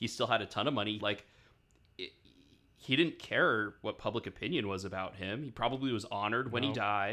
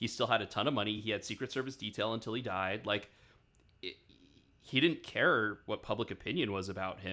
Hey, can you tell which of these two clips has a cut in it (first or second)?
first